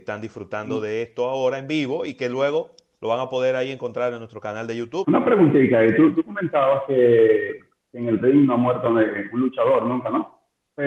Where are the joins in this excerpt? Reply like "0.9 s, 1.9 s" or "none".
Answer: 5.0 s